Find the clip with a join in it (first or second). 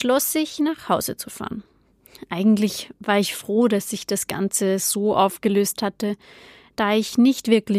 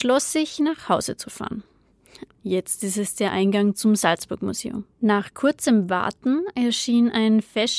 second